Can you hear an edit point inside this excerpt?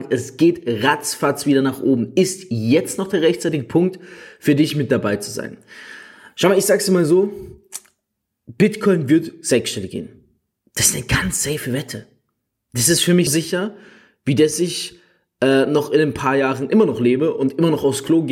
yes; 1 cut; at 13.3 s

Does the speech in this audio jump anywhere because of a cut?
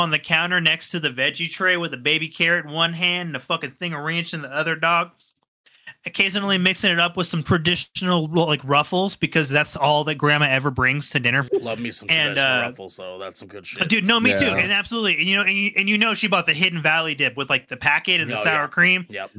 yes; 1 cut; at 11.5 s

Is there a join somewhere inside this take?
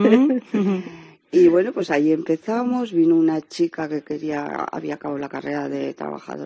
no; 0 cuts

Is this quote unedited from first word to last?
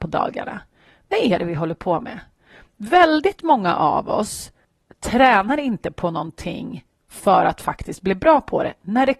yes; 0 cuts

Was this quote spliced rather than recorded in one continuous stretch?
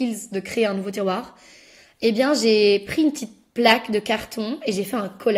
no; 0 cuts

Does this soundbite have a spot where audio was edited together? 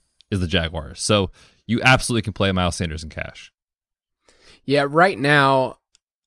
no; 0 cuts

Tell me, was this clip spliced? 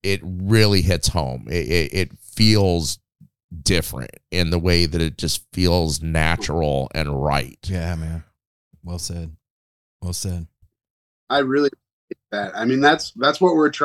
no; 0 cuts

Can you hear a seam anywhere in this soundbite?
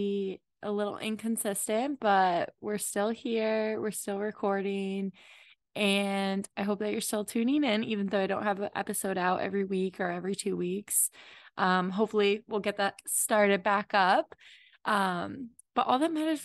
no; 0 cuts

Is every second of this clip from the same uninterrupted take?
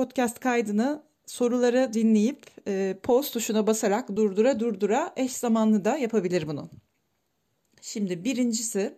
yes; 0 cuts

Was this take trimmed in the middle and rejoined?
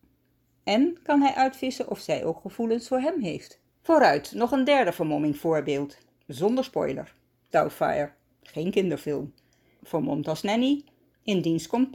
yes; 3 cuts; at 3.7 s, 7.5 s, 9.8 s

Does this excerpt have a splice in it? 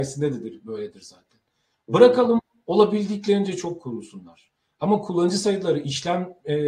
no; 0 cuts

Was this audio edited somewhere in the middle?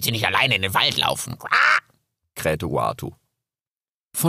no; 0 cuts

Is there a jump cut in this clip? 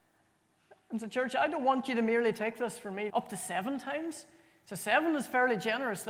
yes; 1 cut; at 3.1 s

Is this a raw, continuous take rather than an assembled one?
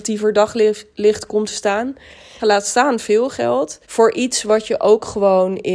no; 2 cuts; at 2.4 s, 3.8 s

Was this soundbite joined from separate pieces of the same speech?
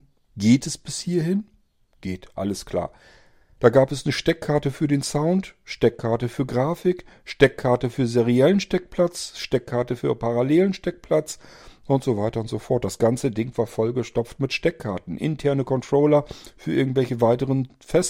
yes; 1 cut; at 3.6 s

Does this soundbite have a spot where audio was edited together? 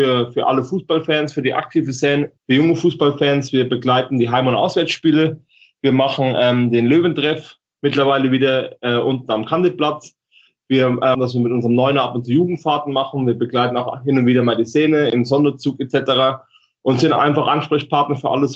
yes; 2 cuts; at 2.4 s, 11.1 s

